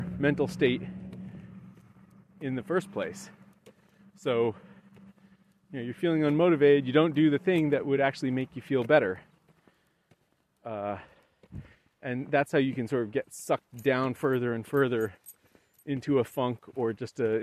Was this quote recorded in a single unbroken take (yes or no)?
yes